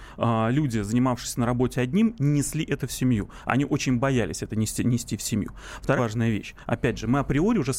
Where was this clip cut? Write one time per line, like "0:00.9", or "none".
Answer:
0:06.0